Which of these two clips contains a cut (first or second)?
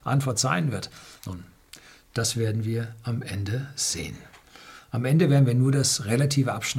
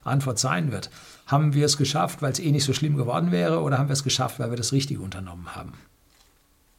first